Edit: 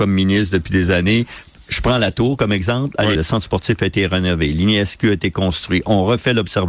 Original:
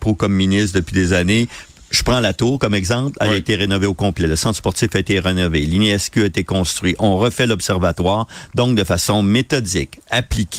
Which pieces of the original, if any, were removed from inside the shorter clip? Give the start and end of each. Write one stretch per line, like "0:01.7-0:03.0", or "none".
0:03.4-0:04.3